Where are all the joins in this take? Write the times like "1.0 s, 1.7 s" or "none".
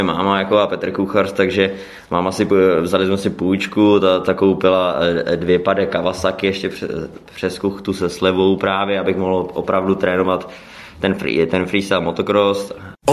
none